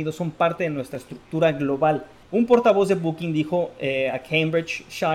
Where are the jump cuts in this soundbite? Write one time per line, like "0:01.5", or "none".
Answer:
0:02.2